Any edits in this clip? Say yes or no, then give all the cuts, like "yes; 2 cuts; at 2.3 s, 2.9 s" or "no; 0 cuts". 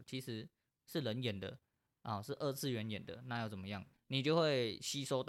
yes; 1 cut; at 3.9 s